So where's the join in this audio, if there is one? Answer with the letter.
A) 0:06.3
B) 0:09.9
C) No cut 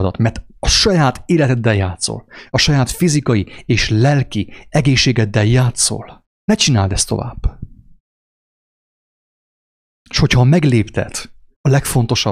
A